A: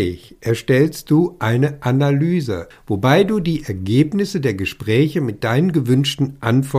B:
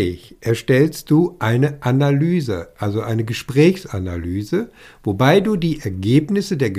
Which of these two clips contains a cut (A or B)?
A